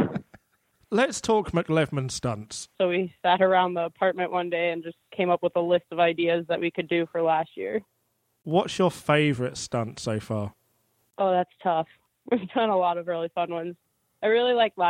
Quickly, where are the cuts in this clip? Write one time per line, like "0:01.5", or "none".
0:02.7